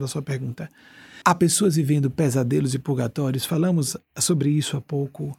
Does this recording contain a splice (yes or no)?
yes